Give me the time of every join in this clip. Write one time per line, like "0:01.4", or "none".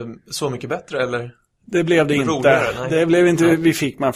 none